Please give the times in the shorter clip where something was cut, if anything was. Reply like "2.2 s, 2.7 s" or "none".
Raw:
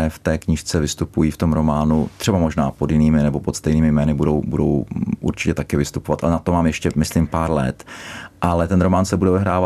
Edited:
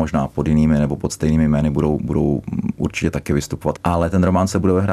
3.8 s